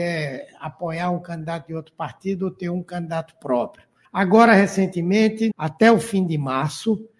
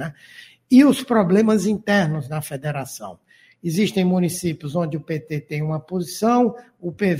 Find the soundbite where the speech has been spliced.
first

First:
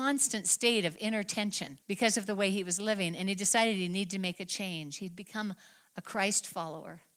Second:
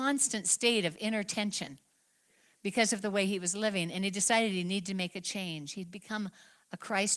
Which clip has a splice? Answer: first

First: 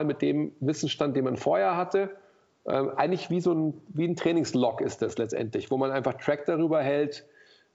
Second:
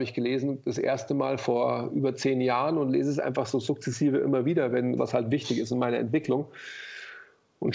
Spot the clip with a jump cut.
second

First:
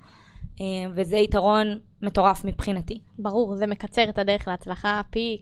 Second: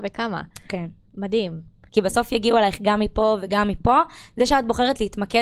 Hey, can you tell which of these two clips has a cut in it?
second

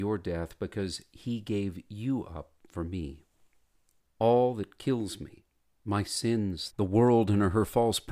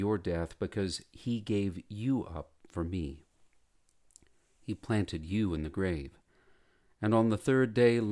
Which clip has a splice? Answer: first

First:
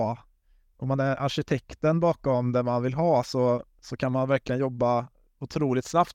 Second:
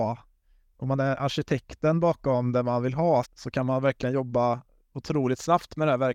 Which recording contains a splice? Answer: second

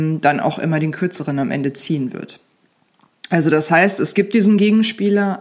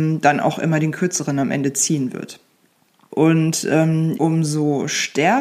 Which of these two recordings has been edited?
second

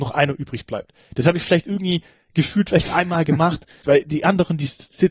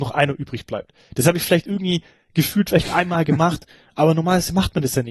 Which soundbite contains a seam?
first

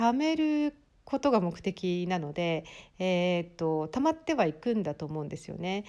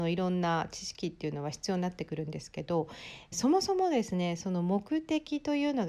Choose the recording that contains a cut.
second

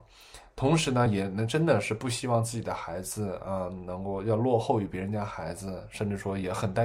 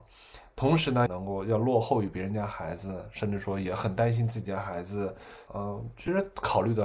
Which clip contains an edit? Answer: second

